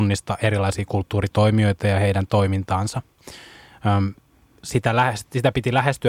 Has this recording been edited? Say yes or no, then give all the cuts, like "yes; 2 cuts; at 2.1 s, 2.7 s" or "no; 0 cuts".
no; 0 cuts